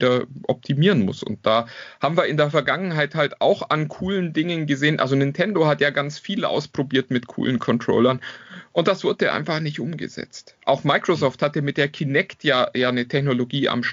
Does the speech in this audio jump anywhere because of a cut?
no; 0 cuts

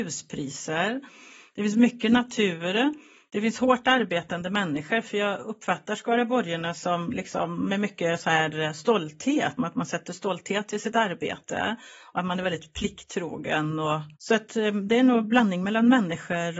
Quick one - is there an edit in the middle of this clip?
yes; 2 cuts; at 9.6 s, 14.1 s

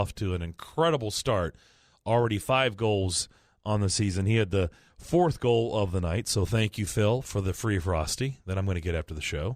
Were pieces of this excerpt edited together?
no; 0 cuts

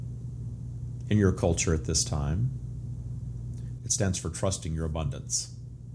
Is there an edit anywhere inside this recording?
yes; 1 cut; at 3.8 s

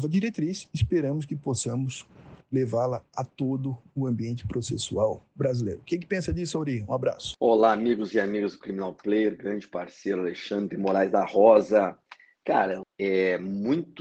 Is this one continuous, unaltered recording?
no; 1 cut; at 12.8 s

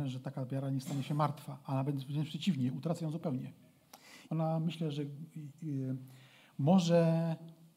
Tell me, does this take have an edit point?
yes; 1 cut; at 4.3 s

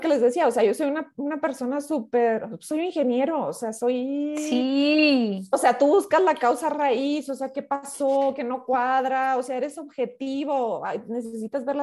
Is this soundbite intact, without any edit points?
yes; 0 cuts

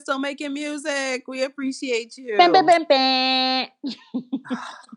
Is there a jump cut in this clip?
no; 0 cuts

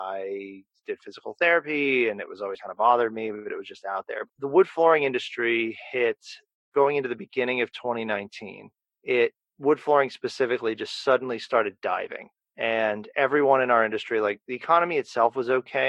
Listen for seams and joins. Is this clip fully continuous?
no; 2 cuts; at 2.6 s, 4.3 s

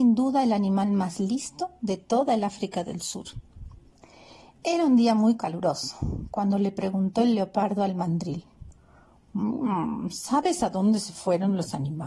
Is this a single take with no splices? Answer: yes; 0 cuts

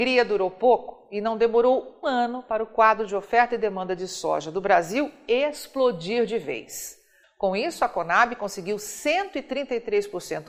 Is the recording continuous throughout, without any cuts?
no; 2 cuts; at 2.0 s, 7.2 s

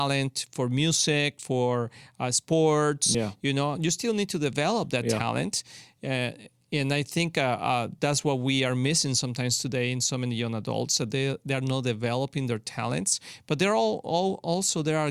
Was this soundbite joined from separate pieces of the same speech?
no; 0 cuts

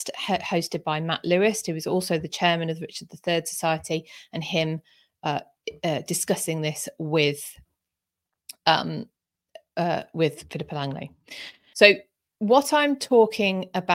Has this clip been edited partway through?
yes; 1 cut; at 11.7 s

